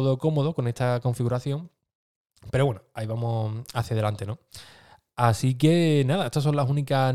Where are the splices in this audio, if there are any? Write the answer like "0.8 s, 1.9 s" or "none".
none